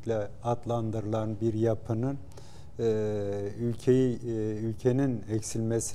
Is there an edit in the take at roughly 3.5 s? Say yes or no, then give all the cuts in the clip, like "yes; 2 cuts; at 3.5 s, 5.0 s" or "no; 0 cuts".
no; 0 cuts